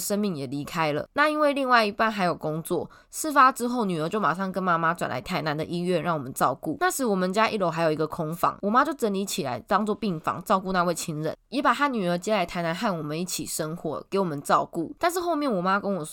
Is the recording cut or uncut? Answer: cut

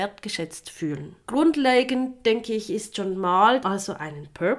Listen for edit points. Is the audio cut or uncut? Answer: cut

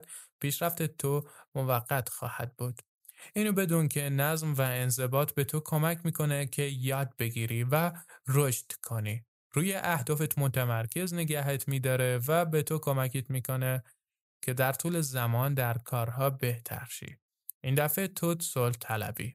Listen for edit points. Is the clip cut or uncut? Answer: uncut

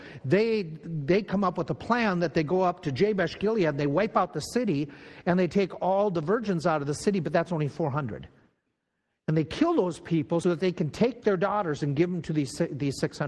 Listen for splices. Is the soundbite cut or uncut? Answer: cut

